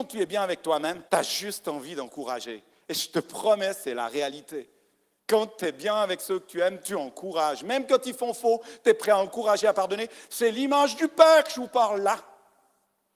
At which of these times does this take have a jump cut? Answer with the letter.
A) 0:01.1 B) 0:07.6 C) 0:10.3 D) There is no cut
A